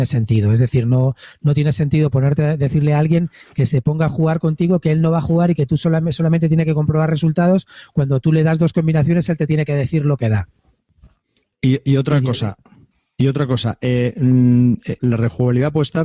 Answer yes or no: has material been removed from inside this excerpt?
yes